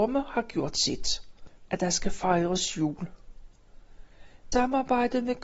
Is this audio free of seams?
no; 2 cuts; at 1.7 s, 4.5 s

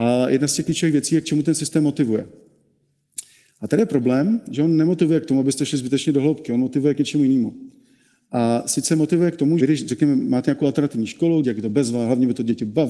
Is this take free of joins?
no; 2 cuts; at 9.6 s, 11.4 s

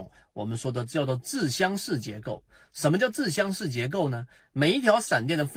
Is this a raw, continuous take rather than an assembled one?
no; 1 cut; at 4.4 s

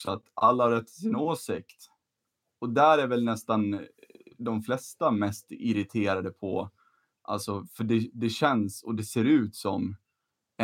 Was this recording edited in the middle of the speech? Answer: no; 0 cuts

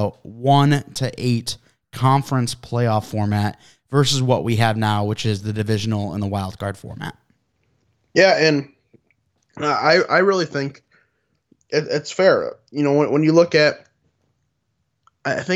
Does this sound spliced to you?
no; 0 cuts

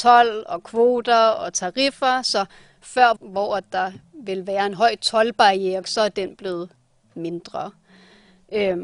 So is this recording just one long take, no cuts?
no; 2 cuts; at 3.2 s, 5.8 s

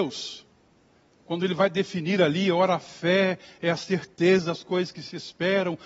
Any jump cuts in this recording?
no; 0 cuts

